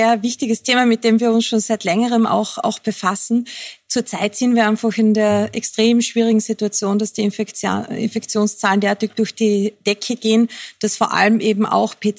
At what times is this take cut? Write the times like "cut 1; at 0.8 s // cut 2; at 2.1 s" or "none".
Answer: none

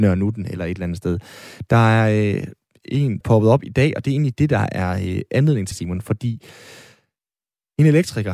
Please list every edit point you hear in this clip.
cut 1; at 3.2 s // cut 2; at 5.7 s

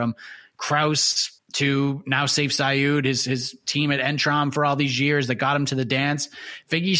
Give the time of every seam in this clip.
cut 1; at 1.4 s

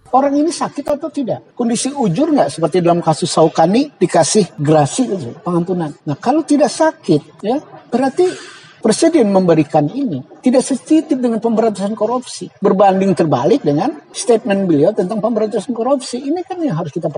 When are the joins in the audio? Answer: none

